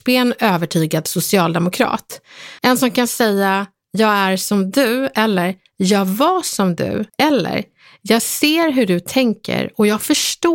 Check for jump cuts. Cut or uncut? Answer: cut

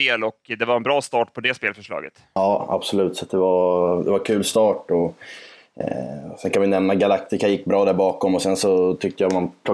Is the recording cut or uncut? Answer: uncut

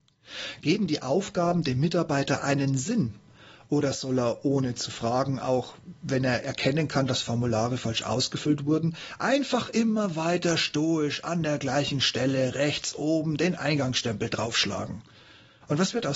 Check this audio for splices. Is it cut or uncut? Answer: uncut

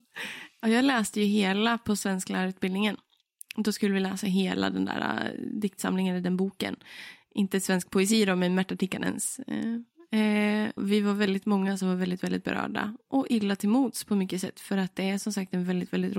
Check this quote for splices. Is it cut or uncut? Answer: cut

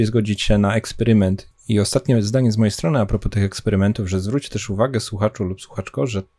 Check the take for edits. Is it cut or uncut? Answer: cut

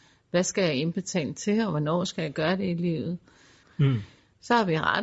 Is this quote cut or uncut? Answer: cut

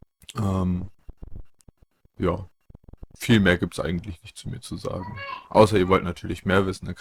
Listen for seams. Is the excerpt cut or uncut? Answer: uncut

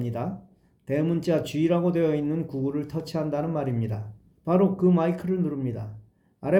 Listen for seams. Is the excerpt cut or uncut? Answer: cut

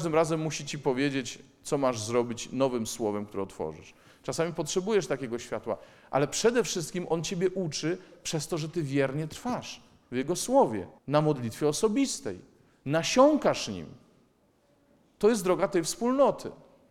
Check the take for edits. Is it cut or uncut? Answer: cut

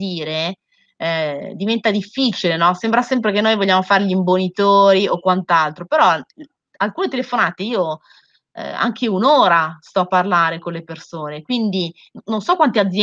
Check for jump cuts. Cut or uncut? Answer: uncut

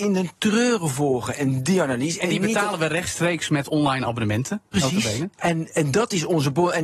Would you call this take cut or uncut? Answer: uncut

